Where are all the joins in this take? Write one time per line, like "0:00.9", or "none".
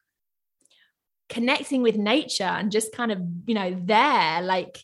none